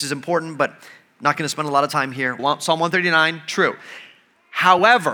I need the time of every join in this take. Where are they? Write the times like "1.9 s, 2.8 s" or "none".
2.4 s